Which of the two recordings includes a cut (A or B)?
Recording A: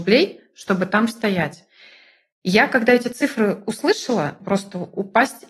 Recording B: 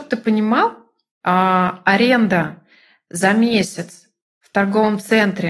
A